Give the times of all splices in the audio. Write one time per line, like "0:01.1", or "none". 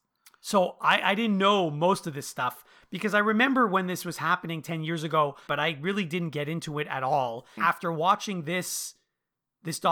0:05.5
0:07.6